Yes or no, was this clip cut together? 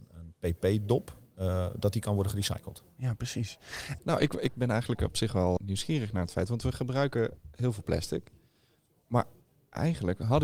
yes